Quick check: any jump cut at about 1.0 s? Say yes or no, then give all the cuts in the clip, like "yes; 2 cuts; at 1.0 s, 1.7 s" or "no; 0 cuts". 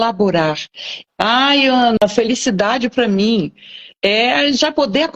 yes; 1 cut; at 1.0 s